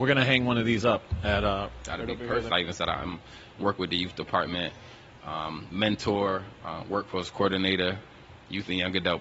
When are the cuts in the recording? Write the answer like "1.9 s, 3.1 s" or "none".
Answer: 2.5 s